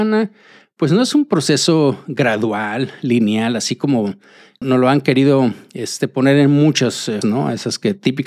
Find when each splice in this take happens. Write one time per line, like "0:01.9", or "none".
0:04.6
0:07.2